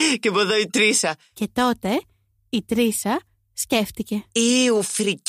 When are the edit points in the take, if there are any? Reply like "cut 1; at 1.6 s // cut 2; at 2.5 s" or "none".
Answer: none